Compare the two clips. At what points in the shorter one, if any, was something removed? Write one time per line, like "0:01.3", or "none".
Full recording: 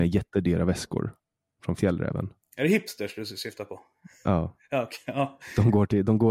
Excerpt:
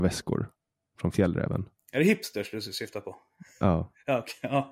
none